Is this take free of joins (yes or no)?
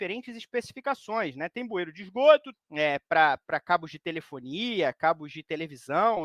no